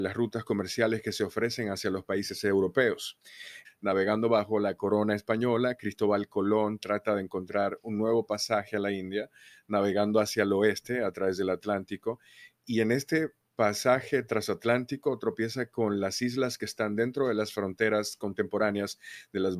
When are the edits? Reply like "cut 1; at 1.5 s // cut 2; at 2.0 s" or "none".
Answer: cut 1; at 3.6 s